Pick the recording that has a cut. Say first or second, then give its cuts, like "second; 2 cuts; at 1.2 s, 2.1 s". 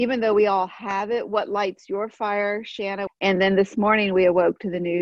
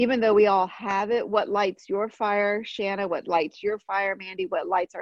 first; 1 cut; at 3.1 s